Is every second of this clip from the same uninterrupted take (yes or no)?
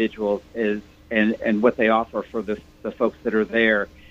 no